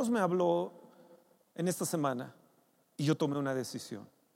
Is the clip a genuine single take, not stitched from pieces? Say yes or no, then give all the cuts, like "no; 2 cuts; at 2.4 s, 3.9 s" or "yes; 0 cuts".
yes; 0 cuts